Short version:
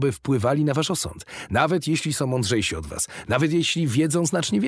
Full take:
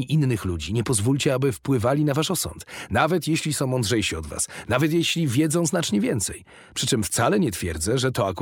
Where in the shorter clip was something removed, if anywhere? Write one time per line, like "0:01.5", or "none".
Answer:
none

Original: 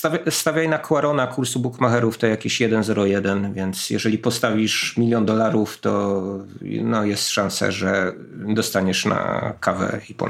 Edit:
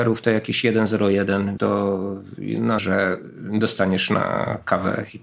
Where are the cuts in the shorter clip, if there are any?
0:01.6
0:02.8

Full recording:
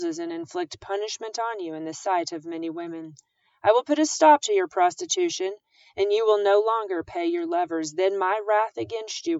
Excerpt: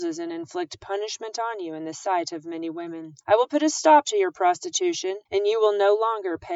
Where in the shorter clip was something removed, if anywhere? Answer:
0:03.2
0:05.3

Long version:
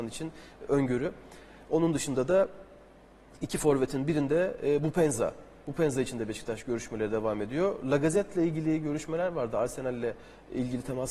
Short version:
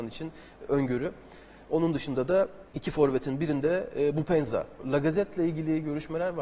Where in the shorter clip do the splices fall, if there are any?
0:02.7
0:04.8

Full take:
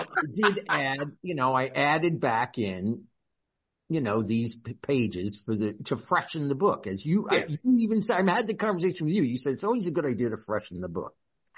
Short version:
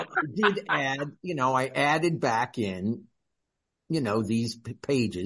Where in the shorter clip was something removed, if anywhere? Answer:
none

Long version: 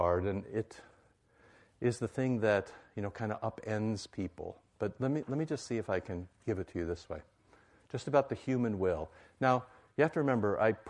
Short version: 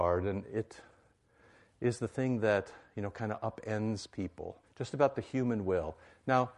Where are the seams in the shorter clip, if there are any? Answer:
0:04.6

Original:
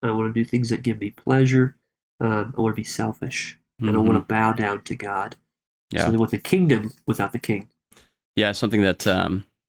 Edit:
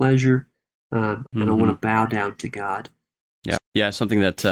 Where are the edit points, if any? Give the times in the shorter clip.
0:01.3
0:03.6

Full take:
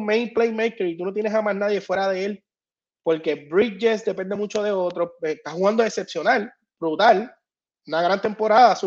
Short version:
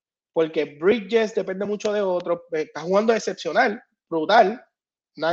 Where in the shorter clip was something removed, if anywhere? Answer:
none

